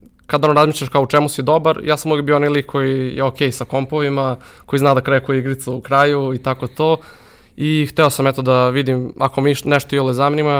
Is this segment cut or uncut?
uncut